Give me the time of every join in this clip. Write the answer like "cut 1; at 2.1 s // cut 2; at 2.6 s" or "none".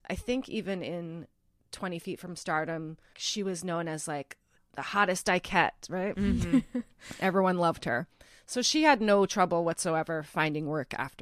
cut 1; at 3.1 s